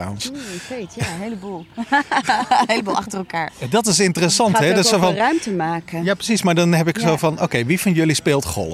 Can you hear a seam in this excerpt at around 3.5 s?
yes; 1 cut; at 3.5 s

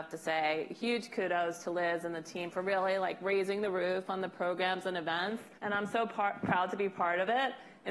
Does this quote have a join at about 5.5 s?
yes; 1 cut; at 5.5 s

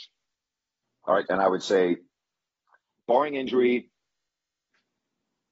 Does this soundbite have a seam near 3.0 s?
no; 1 cut; at 1.3 s

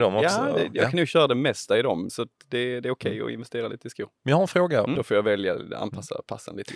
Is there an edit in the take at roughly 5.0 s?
yes; 2 cuts; at 2.1 s, 5.0 s

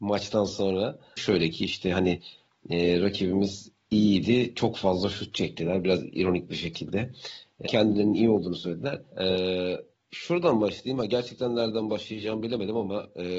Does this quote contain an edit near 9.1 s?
yes; 3 cuts; at 1.2 s, 7.7 s, 9.1 s

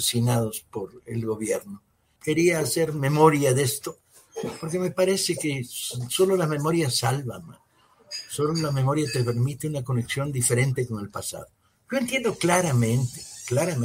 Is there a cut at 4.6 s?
no; 1 cut; at 2.2 s

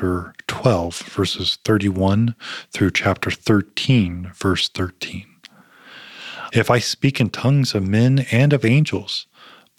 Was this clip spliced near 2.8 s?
no; 1 cut; at 6.5 s

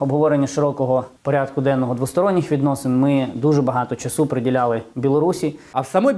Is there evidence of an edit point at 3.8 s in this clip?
no; 1 cut; at 1.2 s

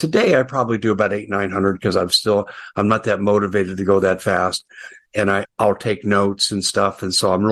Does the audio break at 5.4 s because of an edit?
yes; 1 cut; at 5.4 s

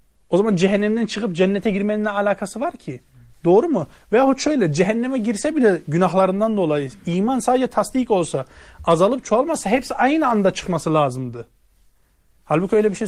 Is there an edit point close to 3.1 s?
no; 0 cuts

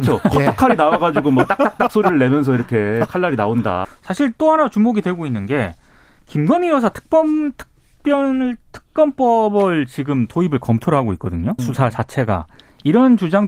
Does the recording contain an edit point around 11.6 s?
yes; 2 cuts; at 3.8 s, 11.6 s

